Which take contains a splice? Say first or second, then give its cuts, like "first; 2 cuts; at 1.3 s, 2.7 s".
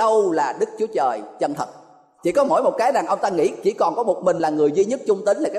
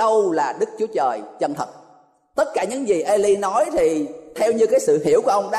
first; 1 cut; at 2.2 s